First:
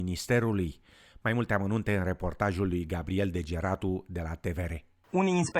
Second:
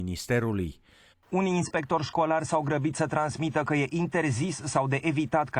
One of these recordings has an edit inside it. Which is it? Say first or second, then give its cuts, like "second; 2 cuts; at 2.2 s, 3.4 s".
second; 1 cut; at 1.1 s